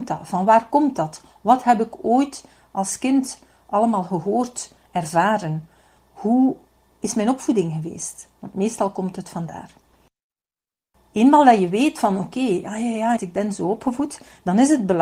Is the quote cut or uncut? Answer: cut